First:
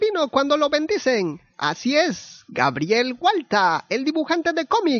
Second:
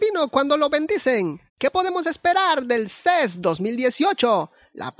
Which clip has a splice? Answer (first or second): second